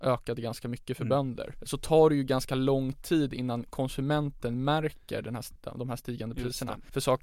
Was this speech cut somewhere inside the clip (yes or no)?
no